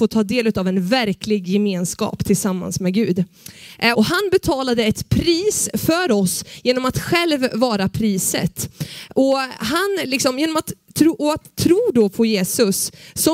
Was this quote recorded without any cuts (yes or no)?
no